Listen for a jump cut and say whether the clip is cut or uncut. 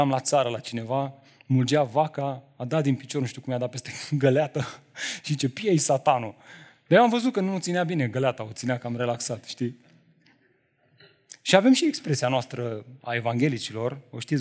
uncut